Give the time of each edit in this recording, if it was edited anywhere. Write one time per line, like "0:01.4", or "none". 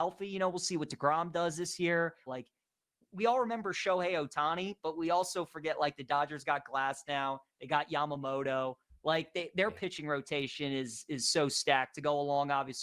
0:02.3